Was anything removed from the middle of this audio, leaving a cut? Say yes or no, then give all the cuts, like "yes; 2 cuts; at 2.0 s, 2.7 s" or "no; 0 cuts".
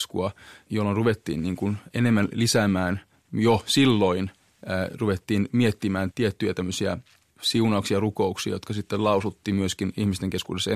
no; 0 cuts